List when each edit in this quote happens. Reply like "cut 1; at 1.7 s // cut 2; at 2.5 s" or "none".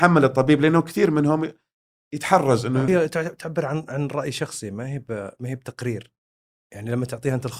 cut 1; at 2.9 s